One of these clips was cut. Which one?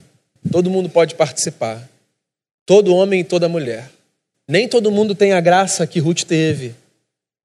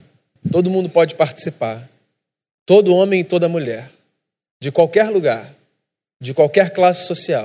first; 1 cut; at 4.3 s

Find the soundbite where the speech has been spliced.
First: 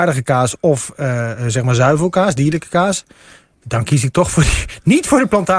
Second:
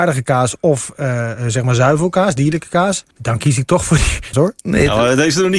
second; 2 cuts; at 3.1 s, 4.3 s

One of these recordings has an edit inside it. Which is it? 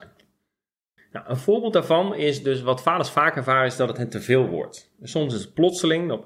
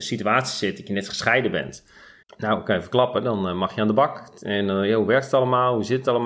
second; 1 cut; at 2.2 s

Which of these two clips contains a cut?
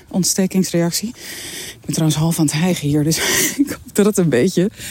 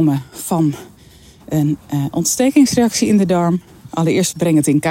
second; 1 cut; at 3.9 s

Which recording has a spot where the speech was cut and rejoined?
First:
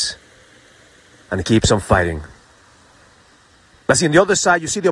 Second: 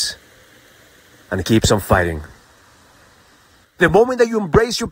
second; 1 cut; at 3.6 s

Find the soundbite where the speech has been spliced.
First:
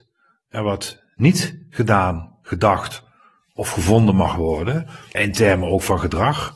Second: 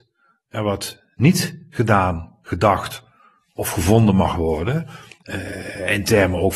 first; 1 cut; at 5.1 s

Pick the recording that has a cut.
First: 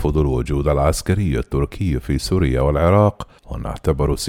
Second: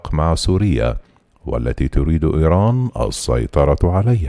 first; 1 cut; at 3.4 s

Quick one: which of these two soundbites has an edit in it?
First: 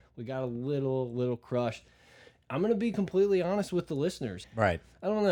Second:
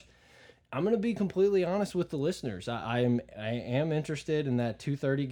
first; 1 cut; at 4.4 s

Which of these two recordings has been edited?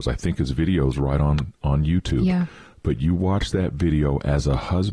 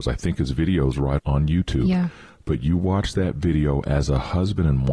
second; 1 cut; at 1.2 s

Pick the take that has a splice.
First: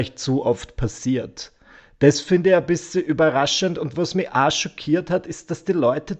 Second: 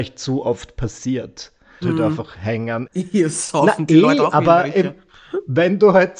second; 2 cuts; at 1.8 s, 2.9 s

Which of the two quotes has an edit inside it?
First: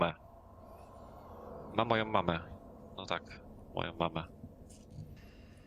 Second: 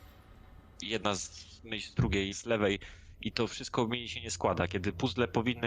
second; 1 cut; at 2.3 s

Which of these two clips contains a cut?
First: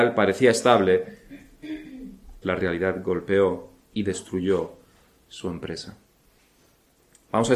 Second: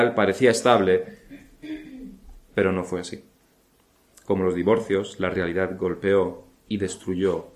first; 1 cut; at 2.4 s

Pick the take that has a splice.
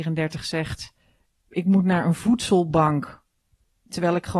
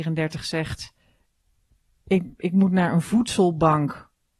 first; 1 cut; at 1.5 s

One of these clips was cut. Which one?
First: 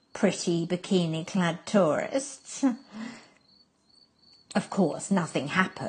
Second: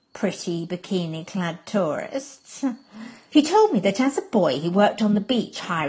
second; 1 cut; at 3.3 s

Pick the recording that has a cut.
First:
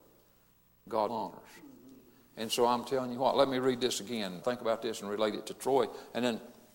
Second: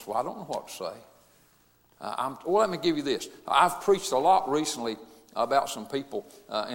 first; 2 cuts; at 1.1 s, 4.4 s

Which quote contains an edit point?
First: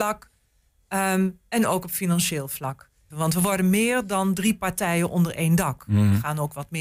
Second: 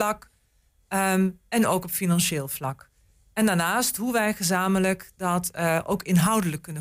first; 1 cut; at 3.1 s

